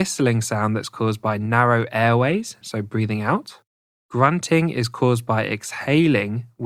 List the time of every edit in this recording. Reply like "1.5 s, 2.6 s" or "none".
2.6 s

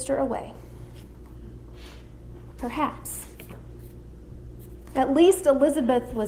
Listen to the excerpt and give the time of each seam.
2.5 s

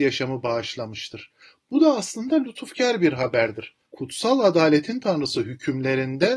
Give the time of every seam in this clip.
3.9 s

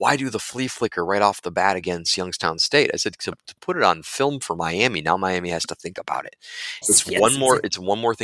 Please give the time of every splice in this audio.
6.8 s

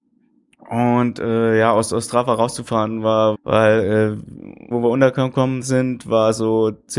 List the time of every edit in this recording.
3.3 s, 4.7 s

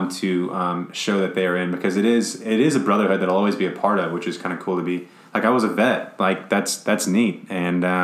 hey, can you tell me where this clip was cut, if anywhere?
none

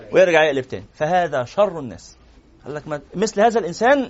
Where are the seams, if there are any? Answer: 3.1 s

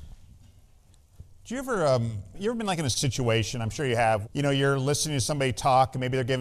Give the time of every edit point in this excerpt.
2.3 s, 4.2 s

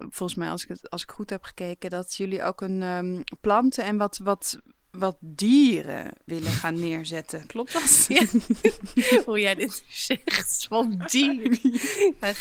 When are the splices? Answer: 6.3 s

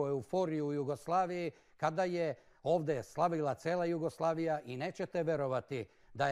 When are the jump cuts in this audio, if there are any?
none

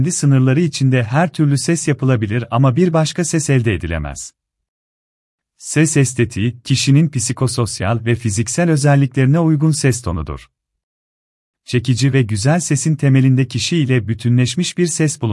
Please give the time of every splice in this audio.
none

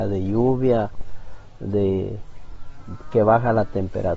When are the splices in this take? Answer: none

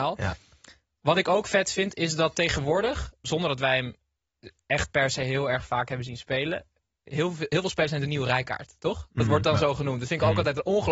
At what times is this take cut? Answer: 3.2 s

